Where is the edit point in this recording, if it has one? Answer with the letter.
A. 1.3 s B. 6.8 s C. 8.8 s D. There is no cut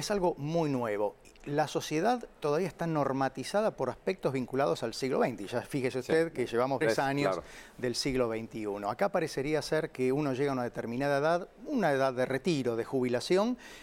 B